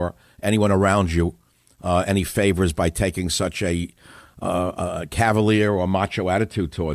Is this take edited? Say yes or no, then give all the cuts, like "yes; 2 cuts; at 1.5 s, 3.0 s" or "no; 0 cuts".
no; 0 cuts